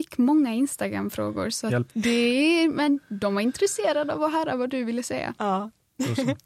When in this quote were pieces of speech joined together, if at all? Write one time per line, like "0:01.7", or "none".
0:01.9